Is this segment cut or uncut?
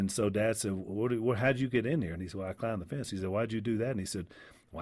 uncut